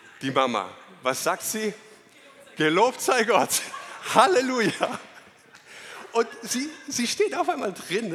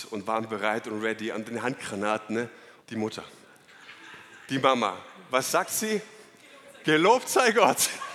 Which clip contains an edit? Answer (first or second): second